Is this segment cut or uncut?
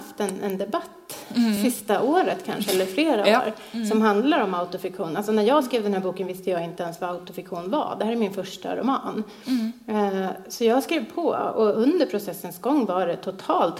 uncut